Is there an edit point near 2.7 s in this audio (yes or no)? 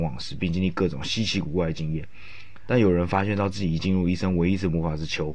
yes